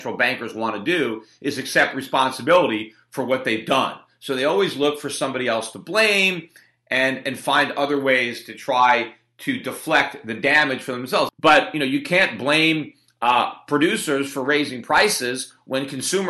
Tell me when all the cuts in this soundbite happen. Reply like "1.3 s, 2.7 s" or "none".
11.3 s